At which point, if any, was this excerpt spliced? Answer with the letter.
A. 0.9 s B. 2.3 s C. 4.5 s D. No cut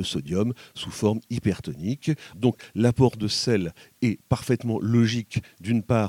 B